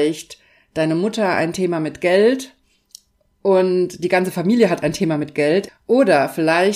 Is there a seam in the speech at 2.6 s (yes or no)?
no